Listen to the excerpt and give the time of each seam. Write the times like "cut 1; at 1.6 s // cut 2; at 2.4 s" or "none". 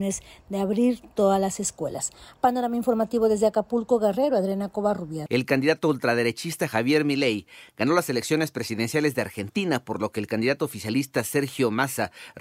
none